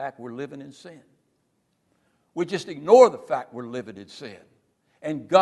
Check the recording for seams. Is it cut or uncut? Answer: uncut